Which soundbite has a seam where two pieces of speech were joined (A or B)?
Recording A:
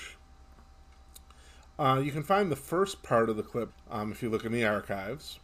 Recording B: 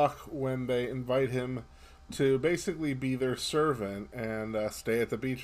A